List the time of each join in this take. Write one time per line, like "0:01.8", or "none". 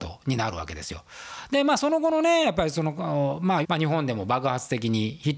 0:03.6